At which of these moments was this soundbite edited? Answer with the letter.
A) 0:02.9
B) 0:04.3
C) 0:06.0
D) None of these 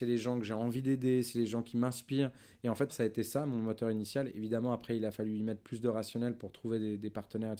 A